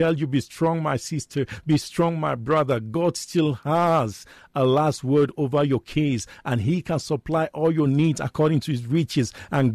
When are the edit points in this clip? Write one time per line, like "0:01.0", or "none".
none